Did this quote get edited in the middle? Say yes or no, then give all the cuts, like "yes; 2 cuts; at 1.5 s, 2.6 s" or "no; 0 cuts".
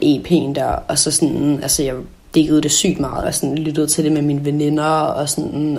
yes; 1 cut; at 3.2 s